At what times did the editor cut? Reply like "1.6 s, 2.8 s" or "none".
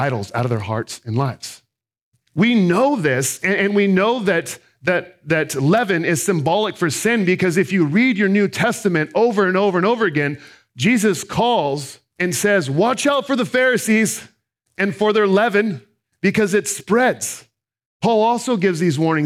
none